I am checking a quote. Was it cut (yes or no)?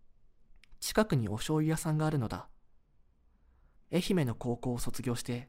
yes